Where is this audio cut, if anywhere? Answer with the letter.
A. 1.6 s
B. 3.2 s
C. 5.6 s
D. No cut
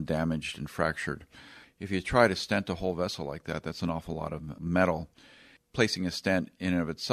A